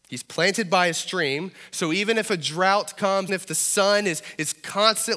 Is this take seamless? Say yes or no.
no